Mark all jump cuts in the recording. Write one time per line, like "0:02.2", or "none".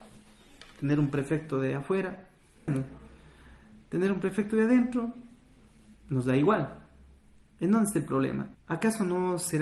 0:02.7
0:08.5